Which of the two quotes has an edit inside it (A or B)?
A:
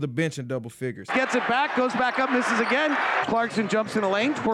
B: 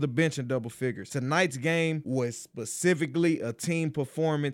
A